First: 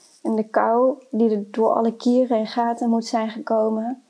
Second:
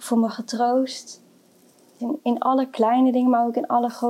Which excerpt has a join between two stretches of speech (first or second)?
second